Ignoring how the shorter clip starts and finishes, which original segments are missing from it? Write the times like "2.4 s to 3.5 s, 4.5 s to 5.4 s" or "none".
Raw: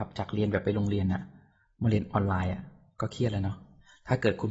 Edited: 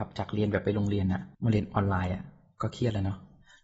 1.3 s to 1.7 s